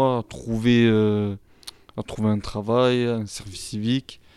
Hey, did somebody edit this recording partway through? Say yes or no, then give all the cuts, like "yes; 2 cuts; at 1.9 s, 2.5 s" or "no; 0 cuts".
no; 0 cuts